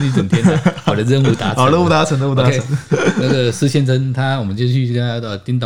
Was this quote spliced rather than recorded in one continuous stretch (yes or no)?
no